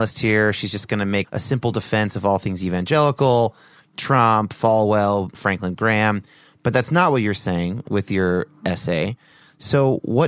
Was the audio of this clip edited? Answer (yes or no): yes